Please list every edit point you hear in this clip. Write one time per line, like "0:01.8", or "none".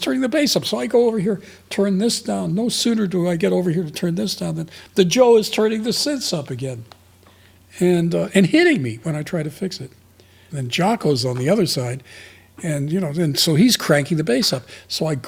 0:10.5